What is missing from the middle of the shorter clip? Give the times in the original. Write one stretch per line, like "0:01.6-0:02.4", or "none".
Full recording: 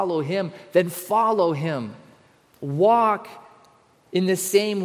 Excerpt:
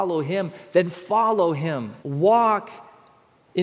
0:02.0-0:02.6